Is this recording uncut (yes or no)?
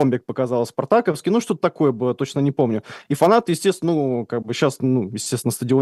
yes